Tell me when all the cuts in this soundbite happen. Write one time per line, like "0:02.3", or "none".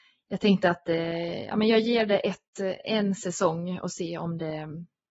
none